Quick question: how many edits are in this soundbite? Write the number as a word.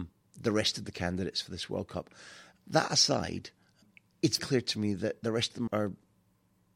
three